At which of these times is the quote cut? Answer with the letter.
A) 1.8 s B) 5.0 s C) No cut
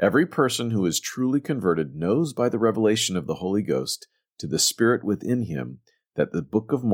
C